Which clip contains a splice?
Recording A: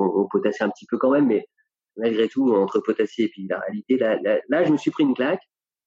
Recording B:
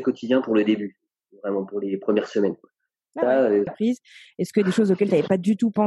B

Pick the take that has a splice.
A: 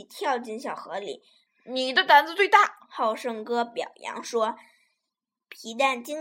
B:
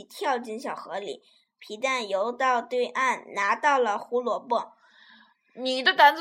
A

